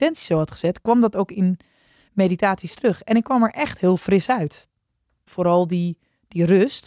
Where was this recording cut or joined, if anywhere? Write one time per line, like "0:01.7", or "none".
0:05.3